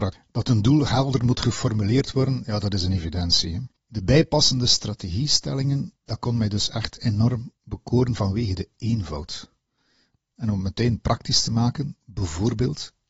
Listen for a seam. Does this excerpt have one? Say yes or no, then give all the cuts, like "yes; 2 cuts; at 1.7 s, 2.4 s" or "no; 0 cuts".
no; 0 cuts